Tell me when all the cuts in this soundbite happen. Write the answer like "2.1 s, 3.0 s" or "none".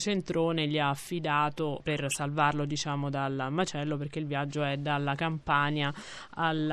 none